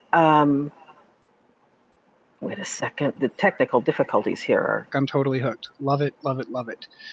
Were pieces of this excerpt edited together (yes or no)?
yes